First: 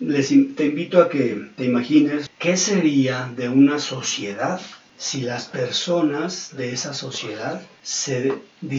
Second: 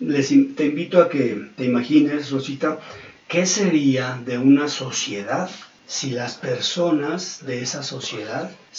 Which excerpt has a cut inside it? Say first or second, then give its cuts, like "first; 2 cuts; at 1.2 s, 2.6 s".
first; 1 cut; at 2.3 s